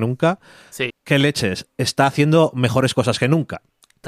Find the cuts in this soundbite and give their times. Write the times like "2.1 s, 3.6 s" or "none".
0.9 s